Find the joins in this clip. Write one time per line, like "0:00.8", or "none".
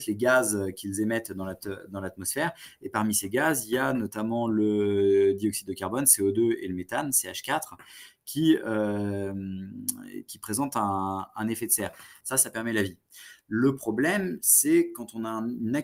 0:12.2